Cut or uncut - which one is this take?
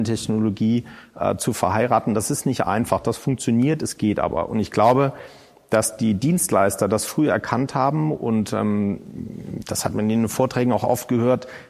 uncut